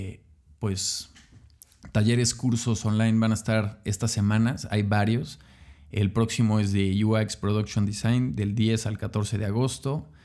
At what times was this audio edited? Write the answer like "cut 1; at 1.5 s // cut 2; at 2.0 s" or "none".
none